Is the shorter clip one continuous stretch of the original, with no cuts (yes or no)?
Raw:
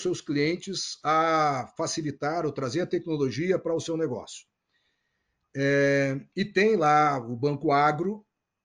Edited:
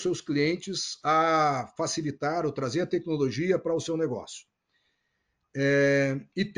yes